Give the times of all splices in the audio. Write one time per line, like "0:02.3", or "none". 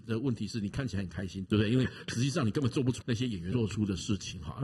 0:01.5